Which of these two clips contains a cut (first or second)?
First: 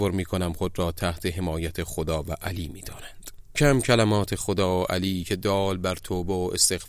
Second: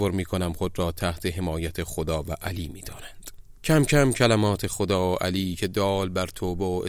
first